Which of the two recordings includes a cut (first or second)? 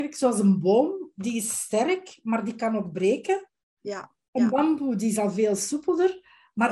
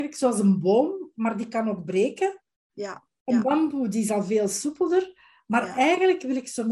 second